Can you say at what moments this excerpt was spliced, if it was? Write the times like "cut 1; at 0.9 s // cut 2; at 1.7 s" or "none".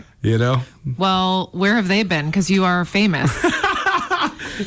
none